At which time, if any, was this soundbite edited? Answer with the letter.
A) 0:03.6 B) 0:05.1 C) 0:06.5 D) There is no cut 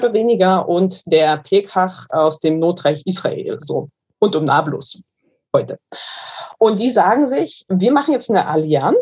A